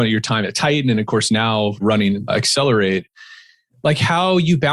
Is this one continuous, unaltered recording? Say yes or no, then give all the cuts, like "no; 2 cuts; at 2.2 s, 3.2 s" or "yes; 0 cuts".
yes; 0 cuts